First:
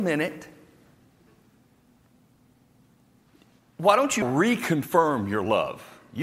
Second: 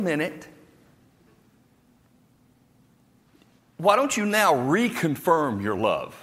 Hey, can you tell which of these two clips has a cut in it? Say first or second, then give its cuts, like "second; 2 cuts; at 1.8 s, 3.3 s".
first; 1 cut; at 4.2 s